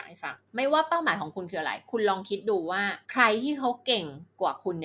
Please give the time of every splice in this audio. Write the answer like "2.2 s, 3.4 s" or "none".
3.0 s